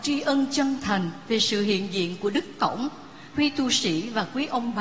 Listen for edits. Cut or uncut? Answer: cut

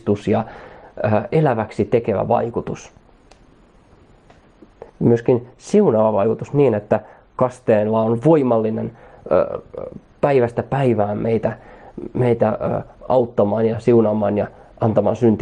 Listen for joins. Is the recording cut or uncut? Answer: cut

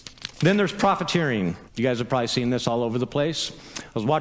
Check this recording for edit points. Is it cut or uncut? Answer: cut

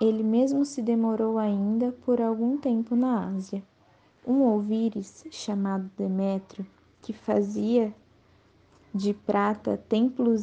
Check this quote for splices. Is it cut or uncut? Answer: cut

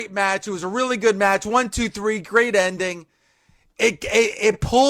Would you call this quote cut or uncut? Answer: uncut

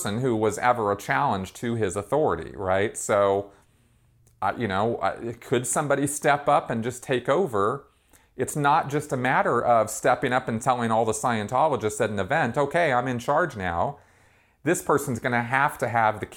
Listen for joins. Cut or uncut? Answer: uncut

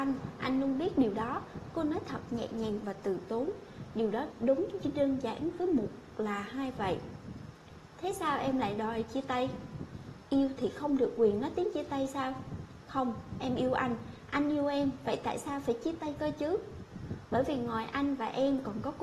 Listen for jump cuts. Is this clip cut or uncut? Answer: cut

